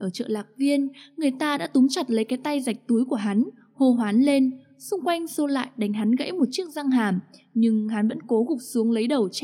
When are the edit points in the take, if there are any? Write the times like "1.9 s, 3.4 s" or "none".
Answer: none